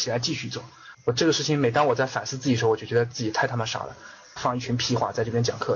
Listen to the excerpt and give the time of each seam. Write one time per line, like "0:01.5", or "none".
0:00.9
0:04.4